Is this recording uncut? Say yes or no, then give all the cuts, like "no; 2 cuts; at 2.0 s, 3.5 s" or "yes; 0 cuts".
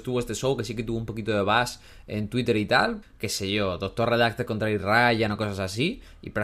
no; 1 cut; at 3.0 s